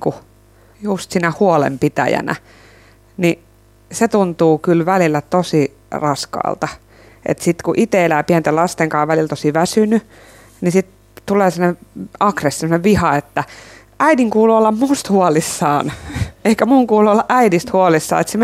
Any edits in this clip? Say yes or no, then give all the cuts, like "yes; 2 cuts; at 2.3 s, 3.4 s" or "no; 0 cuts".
no; 0 cuts